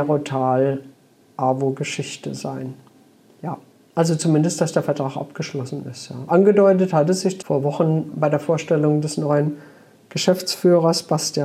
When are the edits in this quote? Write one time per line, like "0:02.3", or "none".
0:03.3
0:07.4